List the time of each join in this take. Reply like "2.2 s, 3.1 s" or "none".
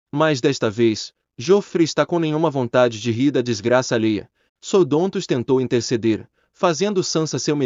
4.5 s